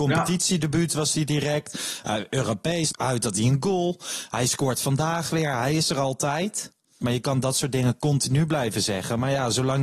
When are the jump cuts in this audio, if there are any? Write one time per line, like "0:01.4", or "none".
0:02.9
0:07.0